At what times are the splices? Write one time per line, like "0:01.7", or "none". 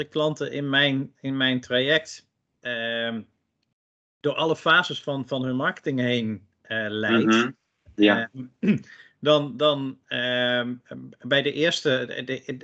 none